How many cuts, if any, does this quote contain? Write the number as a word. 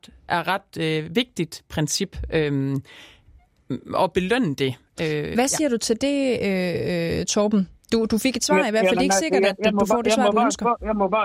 zero